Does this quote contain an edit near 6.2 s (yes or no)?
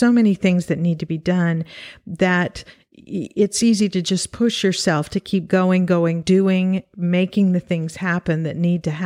yes